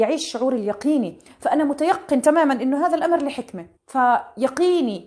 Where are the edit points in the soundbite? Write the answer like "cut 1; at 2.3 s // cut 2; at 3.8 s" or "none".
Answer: cut 1; at 3.8 s